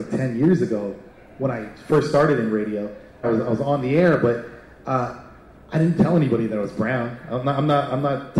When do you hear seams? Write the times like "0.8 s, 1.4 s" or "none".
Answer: 3.2 s